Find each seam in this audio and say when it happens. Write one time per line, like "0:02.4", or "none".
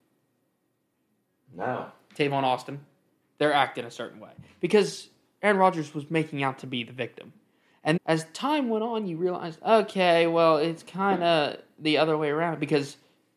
0:03.2
0:08.0